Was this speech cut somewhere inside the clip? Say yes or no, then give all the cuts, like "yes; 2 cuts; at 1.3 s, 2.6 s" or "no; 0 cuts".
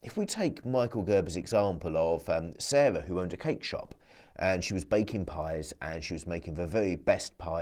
no; 0 cuts